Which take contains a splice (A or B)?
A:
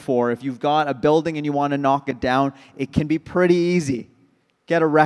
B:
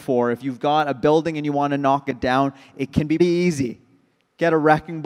B